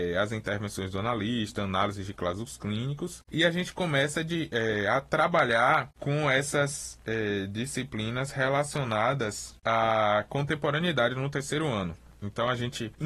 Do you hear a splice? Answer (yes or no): no